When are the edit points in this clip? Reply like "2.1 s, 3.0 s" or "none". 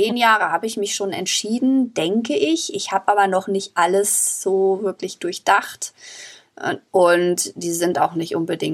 6.9 s

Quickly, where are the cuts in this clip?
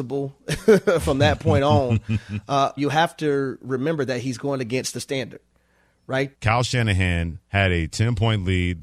2.8 s, 6.3 s, 7.4 s

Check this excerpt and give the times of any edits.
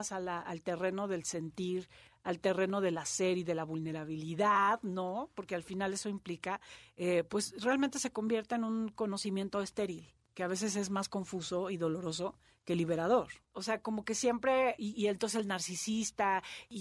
13.4 s, 14.8 s

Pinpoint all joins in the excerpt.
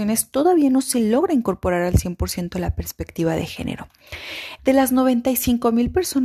4.6 s

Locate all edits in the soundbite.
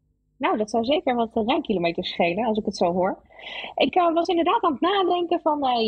none

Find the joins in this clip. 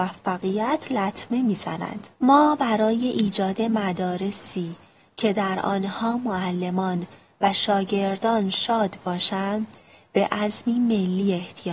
2.1 s

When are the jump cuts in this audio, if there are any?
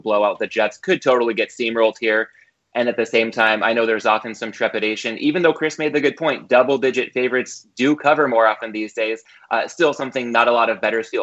none

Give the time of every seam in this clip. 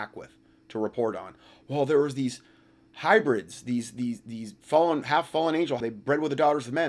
5.8 s

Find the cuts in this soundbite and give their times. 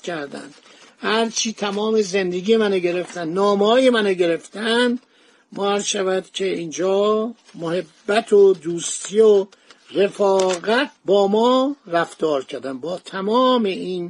none

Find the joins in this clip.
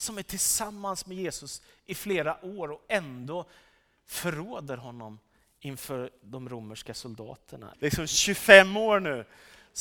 7.7 s

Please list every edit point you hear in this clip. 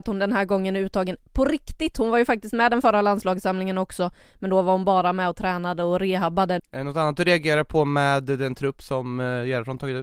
6.6 s

